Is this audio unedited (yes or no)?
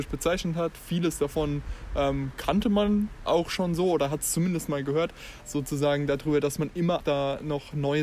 no